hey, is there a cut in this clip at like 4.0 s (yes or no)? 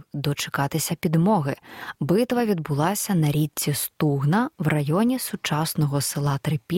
no